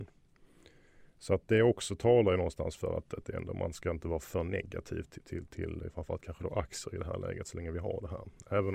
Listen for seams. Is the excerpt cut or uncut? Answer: uncut